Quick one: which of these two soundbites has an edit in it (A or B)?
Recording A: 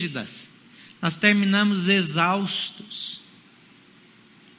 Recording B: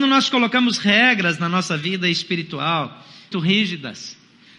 B